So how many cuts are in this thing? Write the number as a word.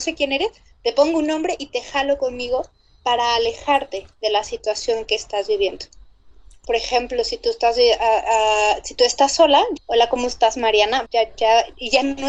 three